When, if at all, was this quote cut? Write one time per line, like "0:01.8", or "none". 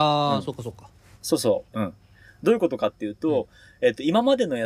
0:01.7